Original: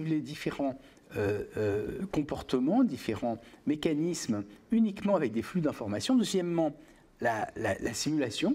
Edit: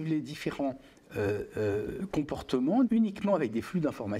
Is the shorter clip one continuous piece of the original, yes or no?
no